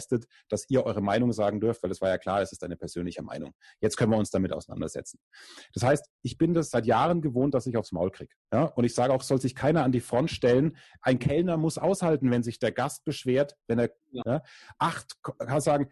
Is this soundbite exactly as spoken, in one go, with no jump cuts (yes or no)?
no